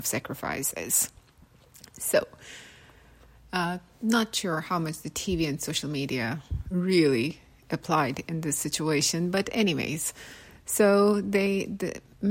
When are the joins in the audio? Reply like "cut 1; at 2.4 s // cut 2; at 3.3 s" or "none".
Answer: none